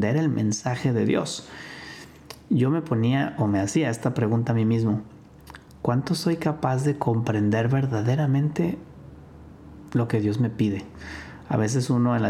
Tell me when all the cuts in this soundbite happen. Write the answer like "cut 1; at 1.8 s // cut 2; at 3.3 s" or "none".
none

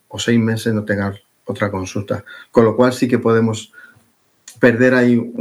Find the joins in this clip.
none

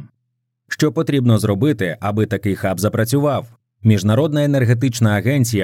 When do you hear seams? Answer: cut 1; at 3.8 s

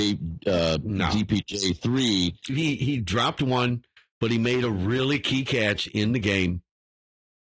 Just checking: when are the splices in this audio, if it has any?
cut 1; at 2.5 s

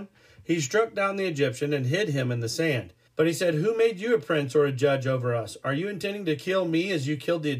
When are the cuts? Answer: cut 1; at 3.1 s

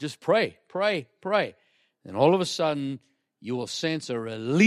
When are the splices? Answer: none

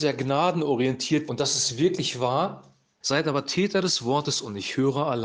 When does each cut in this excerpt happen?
cut 1; at 1.3 s // cut 2; at 3.0 s

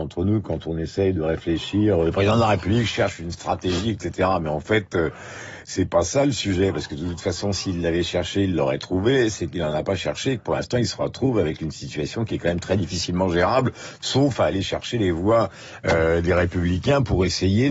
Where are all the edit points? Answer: none

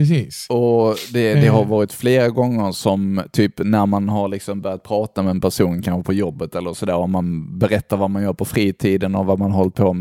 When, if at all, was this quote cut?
none

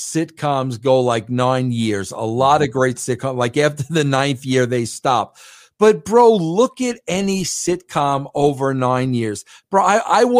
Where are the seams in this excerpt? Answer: none

